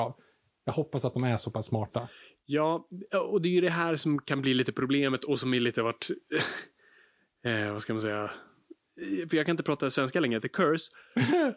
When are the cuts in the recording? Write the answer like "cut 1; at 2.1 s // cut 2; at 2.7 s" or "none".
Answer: none